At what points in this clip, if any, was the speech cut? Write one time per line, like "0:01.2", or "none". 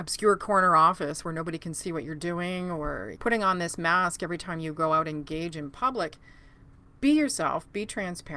0:03.2